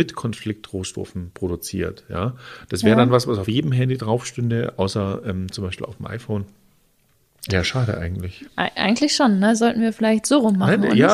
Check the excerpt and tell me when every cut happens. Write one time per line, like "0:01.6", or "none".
0:07.5